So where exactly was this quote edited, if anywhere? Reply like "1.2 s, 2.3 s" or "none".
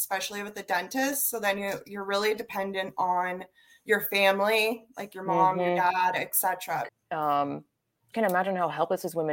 6.9 s, 8.1 s